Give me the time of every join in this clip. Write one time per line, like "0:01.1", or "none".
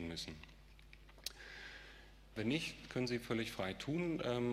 0:02.4